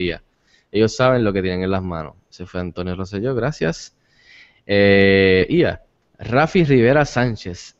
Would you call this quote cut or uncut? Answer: uncut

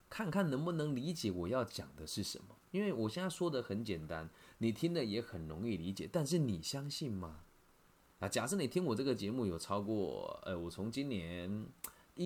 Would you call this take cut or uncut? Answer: uncut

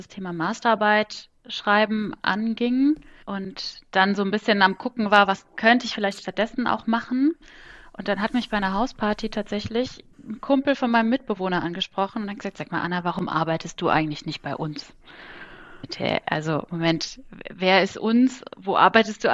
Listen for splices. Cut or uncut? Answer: cut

